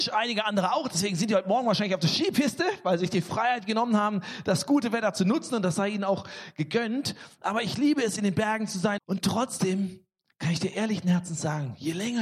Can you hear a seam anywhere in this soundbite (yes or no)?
yes